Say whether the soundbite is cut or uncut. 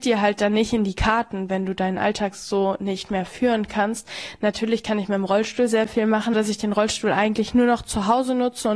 cut